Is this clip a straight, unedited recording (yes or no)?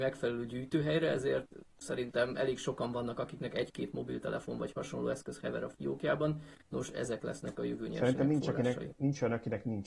yes